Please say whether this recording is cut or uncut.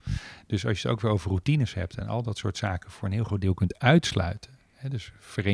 uncut